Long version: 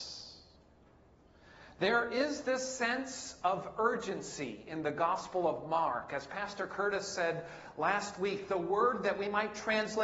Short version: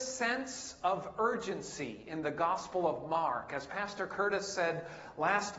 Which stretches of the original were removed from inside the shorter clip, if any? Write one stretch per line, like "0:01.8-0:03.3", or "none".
none